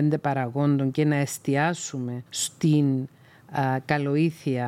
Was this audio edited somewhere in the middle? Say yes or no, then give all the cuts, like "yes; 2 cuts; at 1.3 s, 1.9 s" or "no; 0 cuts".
yes; 1 cut; at 2.3 s